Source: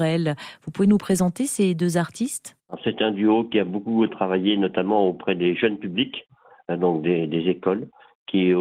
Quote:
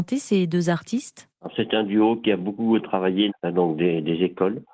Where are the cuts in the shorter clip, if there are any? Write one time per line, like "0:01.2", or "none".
0:03.3